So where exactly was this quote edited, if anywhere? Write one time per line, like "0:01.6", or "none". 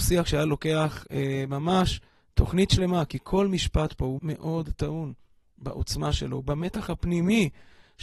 0:04.2